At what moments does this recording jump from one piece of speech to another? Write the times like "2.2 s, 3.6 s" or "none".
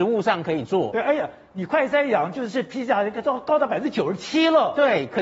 none